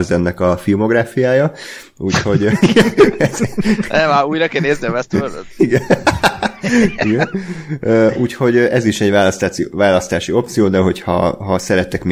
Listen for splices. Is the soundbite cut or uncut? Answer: uncut